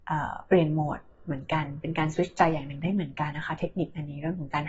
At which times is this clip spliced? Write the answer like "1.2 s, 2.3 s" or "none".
3.3 s